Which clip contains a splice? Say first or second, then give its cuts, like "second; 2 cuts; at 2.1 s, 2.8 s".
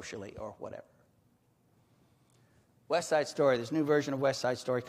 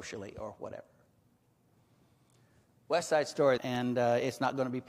second; 1 cut; at 3.6 s